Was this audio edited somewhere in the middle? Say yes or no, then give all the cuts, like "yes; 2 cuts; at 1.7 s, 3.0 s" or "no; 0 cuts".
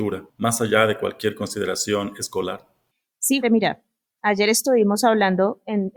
yes; 1 cut; at 3.4 s